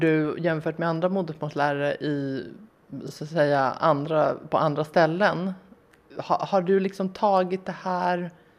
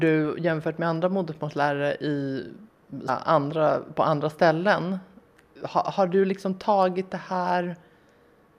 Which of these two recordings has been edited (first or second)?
second